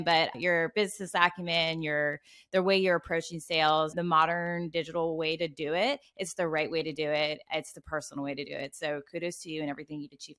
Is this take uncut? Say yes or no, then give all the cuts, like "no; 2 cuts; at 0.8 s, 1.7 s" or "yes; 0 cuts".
yes; 0 cuts